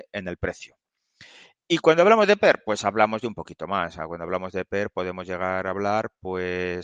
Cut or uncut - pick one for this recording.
uncut